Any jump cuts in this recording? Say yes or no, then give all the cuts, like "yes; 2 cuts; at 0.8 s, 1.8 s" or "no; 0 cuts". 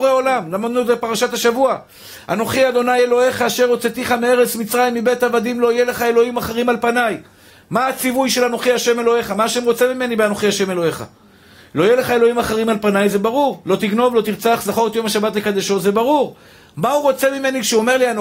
no; 0 cuts